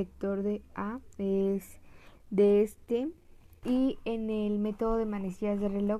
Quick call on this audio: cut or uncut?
cut